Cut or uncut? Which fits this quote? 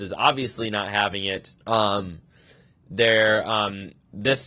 cut